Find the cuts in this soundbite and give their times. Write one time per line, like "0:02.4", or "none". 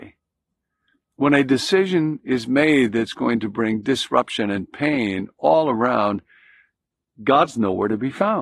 none